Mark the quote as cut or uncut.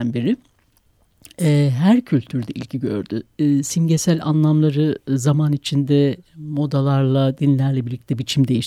uncut